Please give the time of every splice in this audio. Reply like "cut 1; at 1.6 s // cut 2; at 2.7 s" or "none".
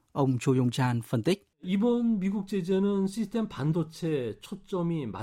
cut 1; at 1.5 s